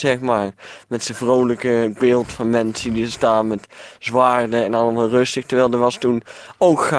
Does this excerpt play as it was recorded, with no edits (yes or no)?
yes